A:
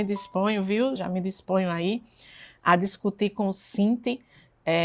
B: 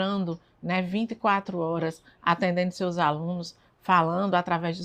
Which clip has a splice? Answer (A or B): A